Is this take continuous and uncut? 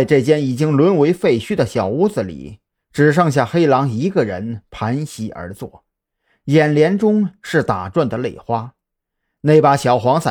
yes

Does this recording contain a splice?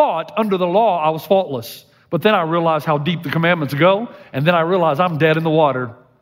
no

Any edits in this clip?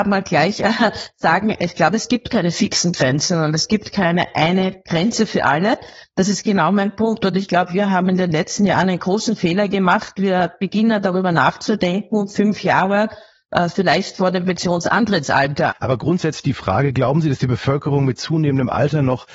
yes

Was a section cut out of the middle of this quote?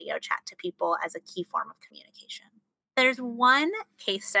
yes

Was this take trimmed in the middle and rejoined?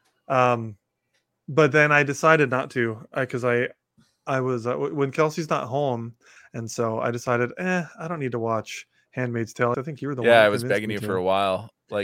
yes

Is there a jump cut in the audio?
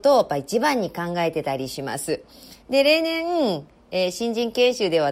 yes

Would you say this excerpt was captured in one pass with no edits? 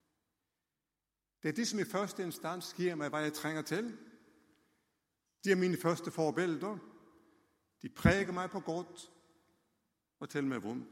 yes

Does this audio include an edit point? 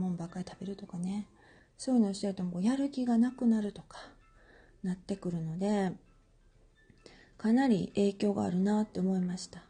no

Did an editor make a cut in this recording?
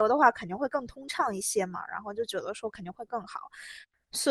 no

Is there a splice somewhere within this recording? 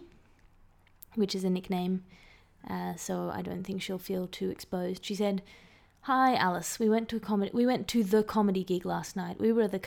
no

